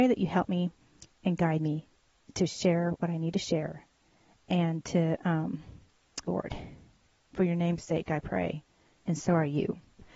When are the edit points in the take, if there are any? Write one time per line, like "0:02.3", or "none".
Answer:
0:06.2
0:09.0